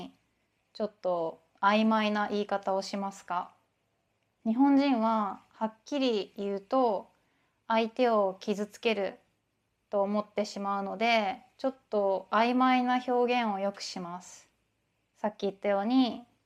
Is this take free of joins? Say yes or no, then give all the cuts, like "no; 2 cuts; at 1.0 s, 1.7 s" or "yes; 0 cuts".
yes; 0 cuts